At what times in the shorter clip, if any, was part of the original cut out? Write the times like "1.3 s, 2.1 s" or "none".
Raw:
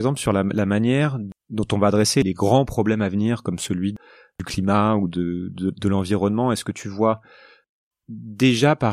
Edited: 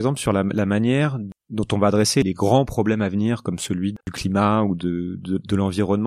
4.0 s